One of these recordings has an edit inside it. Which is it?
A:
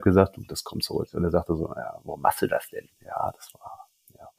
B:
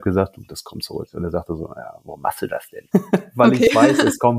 B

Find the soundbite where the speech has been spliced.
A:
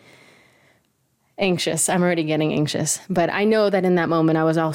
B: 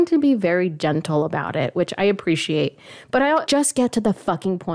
B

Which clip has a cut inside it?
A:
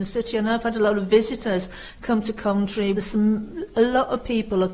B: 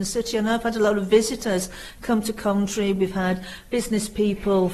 A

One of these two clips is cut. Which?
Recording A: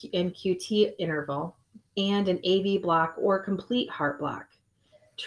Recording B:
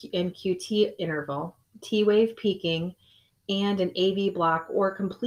A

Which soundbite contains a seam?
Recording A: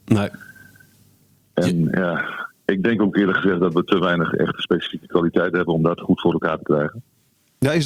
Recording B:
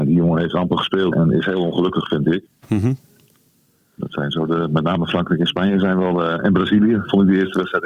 B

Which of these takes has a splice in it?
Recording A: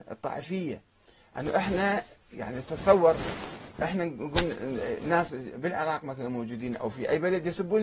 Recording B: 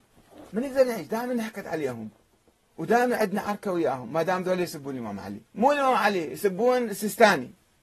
B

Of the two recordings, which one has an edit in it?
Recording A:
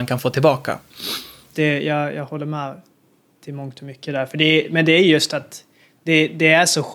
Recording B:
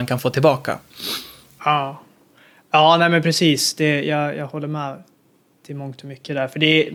A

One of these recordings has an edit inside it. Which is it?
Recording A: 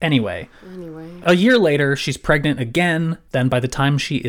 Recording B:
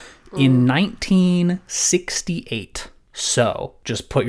A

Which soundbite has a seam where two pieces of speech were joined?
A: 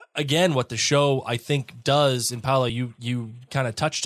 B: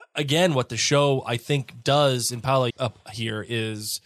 B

